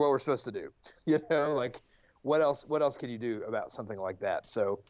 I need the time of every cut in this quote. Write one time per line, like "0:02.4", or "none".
none